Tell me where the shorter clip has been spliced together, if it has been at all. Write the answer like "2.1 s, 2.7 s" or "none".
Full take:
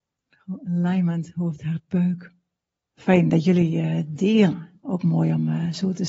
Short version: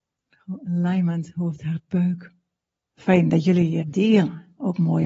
3.8 s